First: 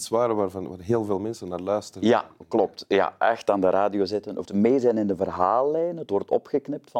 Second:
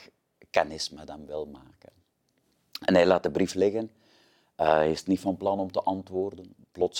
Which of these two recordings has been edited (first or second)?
first